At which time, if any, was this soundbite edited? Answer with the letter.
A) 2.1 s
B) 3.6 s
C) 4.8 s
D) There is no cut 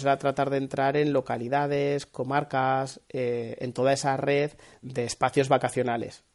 C